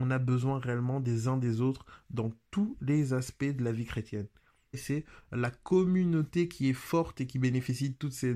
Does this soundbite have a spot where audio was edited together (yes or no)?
yes